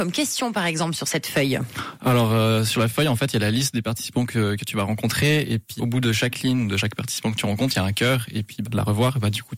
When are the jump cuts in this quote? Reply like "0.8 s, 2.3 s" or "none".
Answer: 5.8 s, 8.7 s